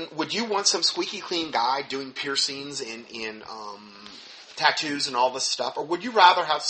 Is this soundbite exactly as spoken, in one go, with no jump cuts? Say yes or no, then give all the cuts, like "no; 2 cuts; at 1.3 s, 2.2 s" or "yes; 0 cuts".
yes; 0 cuts